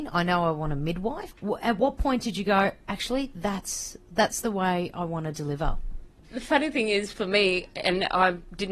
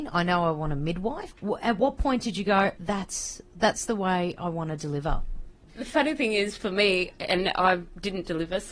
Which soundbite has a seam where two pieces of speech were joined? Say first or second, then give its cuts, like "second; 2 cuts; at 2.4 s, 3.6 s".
second; 1 cut; at 2.8 s